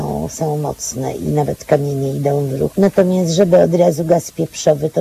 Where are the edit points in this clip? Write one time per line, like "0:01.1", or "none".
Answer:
0:01.2
0:02.7